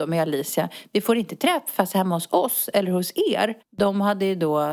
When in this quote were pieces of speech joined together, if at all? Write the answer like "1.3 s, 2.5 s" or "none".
3.6 s